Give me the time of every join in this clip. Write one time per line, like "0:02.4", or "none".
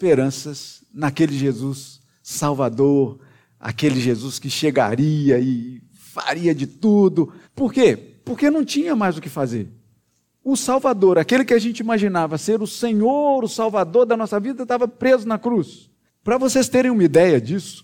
0:07.4
0:16.1